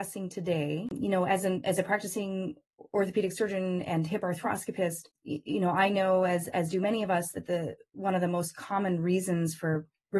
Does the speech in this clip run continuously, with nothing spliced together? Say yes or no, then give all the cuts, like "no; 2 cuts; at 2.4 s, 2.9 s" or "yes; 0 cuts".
yes; 0 cuts